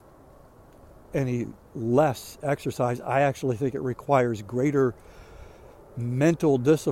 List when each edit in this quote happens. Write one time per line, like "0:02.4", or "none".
none